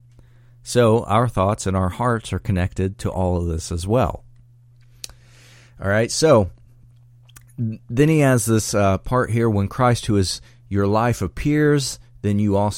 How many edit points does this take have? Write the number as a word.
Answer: zero